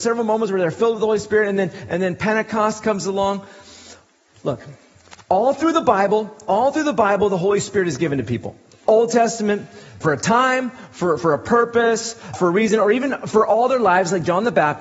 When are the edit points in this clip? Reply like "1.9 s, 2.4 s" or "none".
10.0 s, 12.3 s